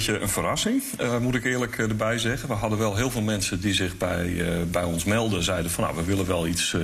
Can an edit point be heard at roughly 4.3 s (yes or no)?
no